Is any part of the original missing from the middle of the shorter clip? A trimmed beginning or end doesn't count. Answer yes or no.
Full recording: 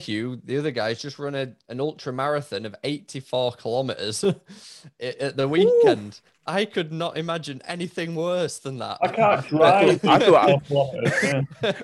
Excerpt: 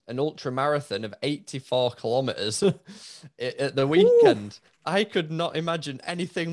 no